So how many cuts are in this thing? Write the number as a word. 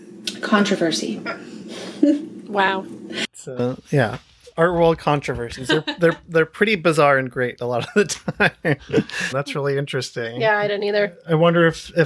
one